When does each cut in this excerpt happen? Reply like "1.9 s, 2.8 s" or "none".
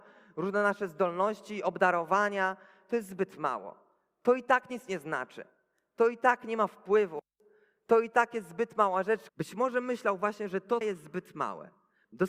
9.3 s, 10.8 s

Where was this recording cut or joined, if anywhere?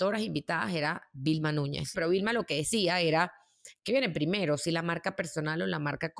1.9 s

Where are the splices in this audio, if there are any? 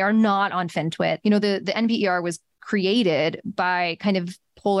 1.2 s

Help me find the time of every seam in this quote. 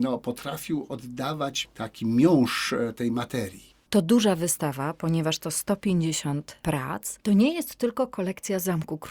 3.7 s

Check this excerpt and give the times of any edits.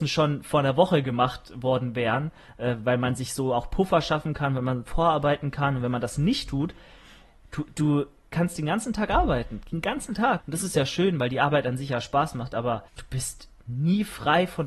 10.4 s, 12.9 s

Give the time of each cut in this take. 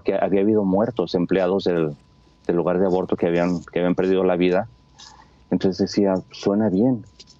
none

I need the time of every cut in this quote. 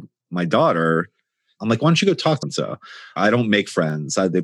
2.4 s

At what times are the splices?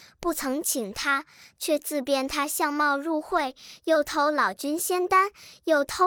1.5 s, 3.8 s

